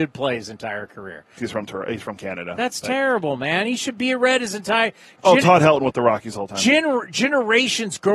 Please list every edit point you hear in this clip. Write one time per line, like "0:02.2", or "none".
0:01.4